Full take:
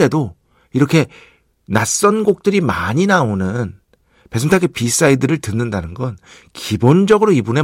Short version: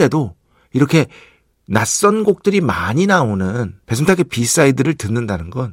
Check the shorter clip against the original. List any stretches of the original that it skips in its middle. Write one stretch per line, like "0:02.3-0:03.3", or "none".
0:03.8-0:04.3